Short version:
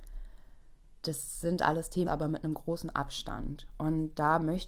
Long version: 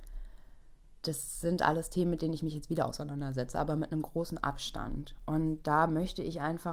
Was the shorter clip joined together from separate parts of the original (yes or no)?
yes